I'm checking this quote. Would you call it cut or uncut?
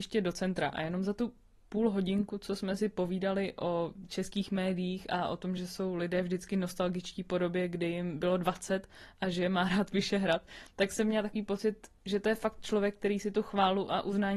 uncut